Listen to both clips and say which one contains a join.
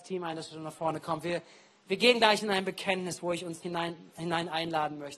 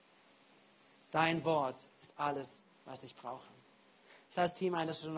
first; 1 cut; at 3.6 s

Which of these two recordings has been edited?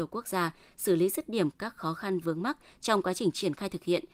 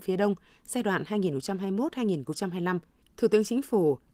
second; 1 cut; at 3.0 s

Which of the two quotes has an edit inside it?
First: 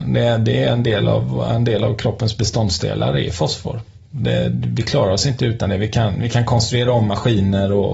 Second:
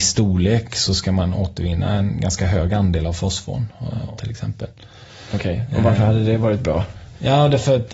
second; 1 cut; at 4.2 s

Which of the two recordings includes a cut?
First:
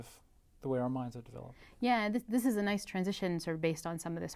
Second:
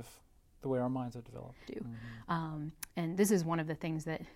second; 1 cut; at 1.7 s

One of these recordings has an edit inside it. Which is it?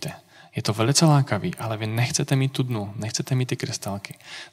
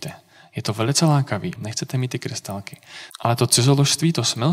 second; 2 cuts; at 1.6 s, 3.1 s

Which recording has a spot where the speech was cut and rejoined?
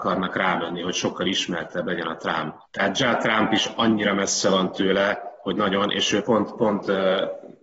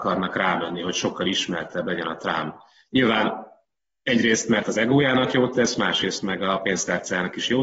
first; 1 cut; at 2.7 s

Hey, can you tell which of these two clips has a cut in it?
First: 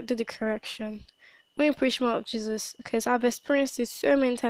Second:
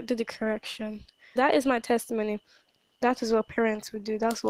second; 2 cuts; at 1.4 s, 2.9 s

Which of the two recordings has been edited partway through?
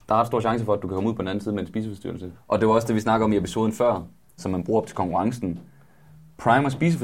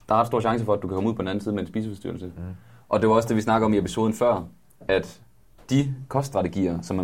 first; 2 cuts; at 2.3 s, 4.4 s

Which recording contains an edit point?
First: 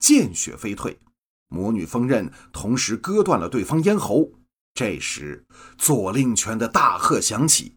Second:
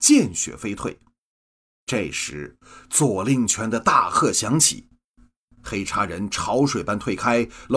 first; 2 cuts; at 1.4 s, 4.6 s

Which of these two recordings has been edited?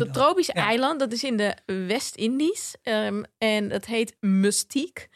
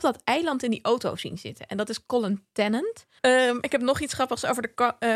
second; 1 cut; at 3.2 s

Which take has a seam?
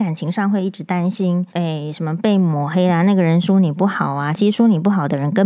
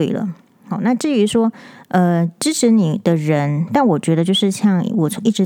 first; 1 cut; at 1.5 s

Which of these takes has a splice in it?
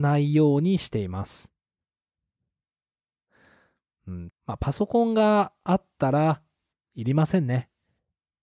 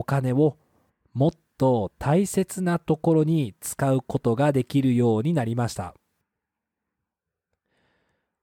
first; 1 cut; at 4.3 s

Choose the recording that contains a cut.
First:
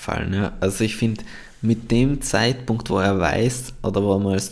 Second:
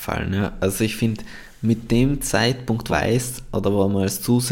second; 1 cut; at 2.9 s

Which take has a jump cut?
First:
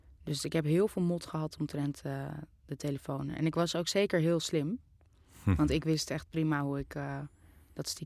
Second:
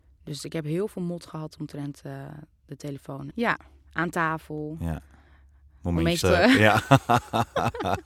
second; 2 cuts; at 3.3 s, 6.2 s

